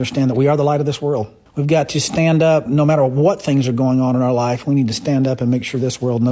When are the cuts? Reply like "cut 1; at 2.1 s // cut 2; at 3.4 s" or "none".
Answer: none